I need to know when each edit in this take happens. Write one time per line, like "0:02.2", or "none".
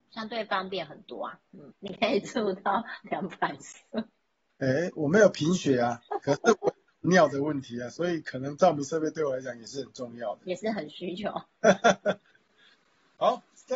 0:01.7